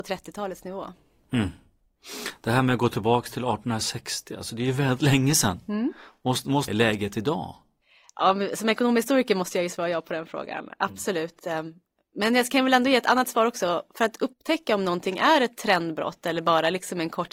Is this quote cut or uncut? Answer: cut